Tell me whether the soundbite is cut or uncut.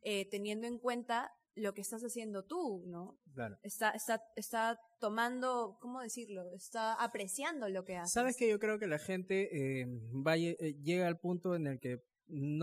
uncut